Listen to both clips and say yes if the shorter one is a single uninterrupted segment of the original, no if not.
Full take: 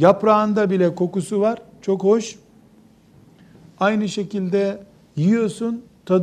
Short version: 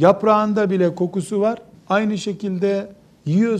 no